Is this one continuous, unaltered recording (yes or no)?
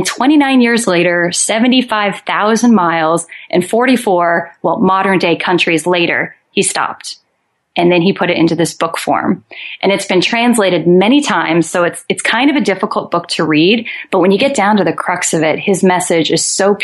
yes